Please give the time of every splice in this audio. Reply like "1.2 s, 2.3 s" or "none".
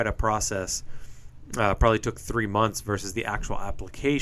none